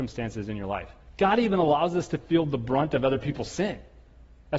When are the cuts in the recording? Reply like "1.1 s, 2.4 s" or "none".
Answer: none